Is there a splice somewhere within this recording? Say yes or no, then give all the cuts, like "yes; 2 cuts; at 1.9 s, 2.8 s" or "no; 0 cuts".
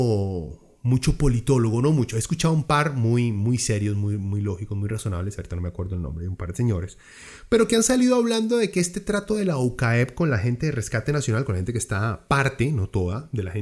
no; 0 cuts